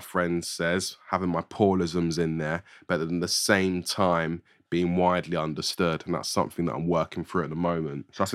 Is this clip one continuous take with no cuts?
yes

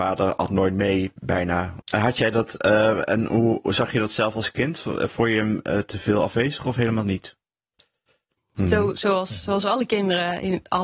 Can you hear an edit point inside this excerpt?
yes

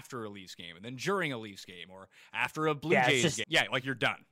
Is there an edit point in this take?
yes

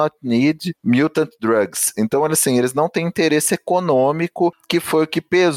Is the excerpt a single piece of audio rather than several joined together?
yes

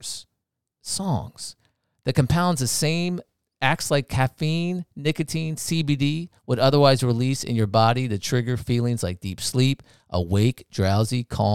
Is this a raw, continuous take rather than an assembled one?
yes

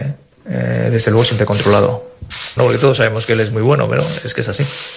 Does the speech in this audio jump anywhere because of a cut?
yes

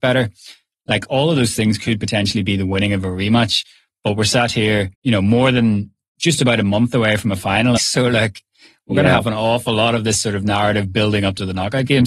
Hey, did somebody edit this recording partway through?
yes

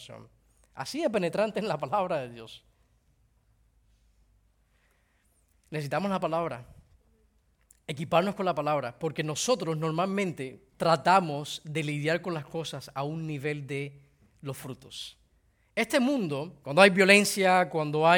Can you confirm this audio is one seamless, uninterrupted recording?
no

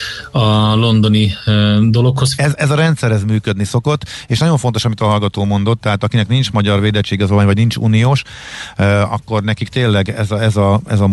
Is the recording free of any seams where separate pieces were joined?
no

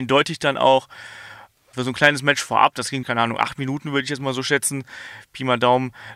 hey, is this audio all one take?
no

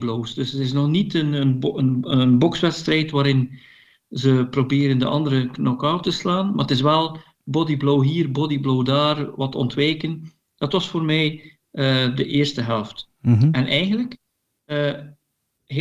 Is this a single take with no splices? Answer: yes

